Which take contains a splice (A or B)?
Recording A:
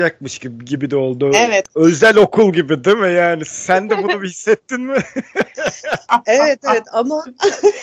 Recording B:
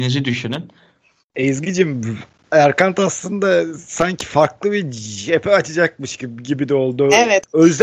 B